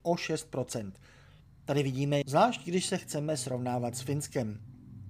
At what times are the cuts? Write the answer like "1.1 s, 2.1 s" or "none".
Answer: 2.2 s